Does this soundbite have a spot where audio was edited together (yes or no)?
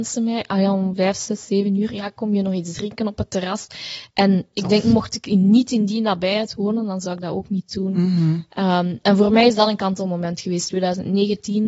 no